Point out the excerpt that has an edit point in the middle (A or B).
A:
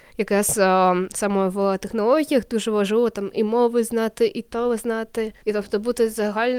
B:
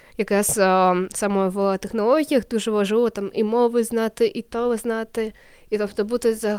A